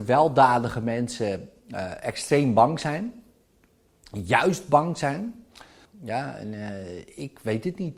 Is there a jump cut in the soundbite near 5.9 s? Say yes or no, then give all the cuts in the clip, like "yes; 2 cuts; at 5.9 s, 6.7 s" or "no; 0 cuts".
yes; 1 cut; at 5.9 s